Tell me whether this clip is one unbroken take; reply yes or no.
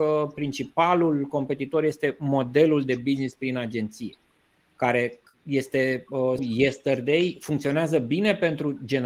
no